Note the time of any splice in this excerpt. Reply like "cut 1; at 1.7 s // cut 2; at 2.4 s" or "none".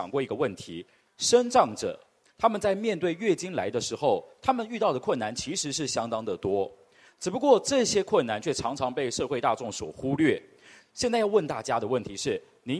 none